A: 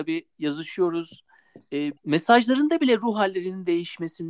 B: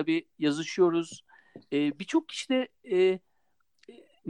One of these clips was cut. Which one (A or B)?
A